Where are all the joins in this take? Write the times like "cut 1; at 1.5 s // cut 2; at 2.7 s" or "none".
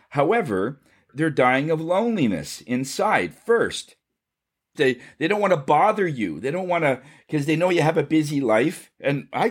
cut 1; at 4.7 s